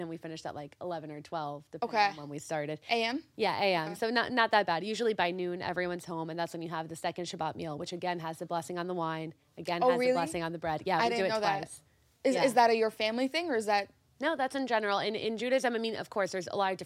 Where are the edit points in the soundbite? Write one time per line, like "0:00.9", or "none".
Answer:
none